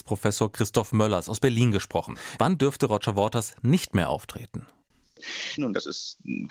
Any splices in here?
yes; 2 cuts; at 2.4 s, 5.6 s

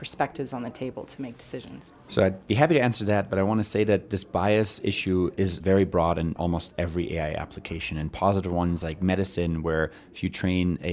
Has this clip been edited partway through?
no; 0 cuts

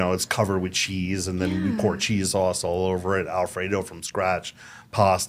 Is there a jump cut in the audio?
no; 0 cuts

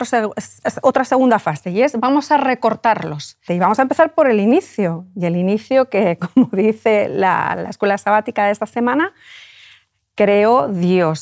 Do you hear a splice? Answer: yes; 1 cut; at 3.5 s

